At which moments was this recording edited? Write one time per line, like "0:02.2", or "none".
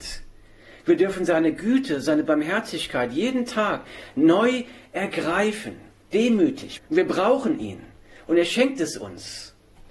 0:06.8